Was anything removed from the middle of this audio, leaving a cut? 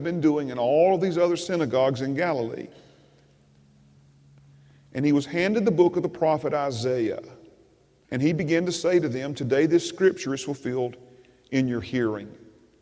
yes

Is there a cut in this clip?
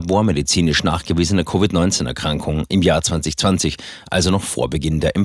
no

